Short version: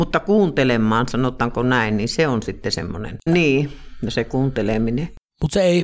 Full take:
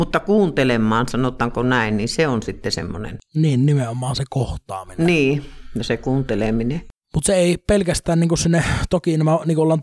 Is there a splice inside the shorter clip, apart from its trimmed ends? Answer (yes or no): yes